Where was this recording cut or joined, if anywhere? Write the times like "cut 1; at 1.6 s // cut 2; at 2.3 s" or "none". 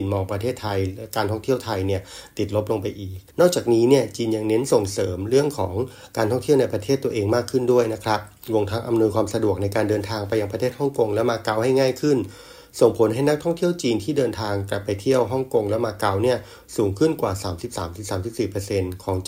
cut 1; at 3.3 s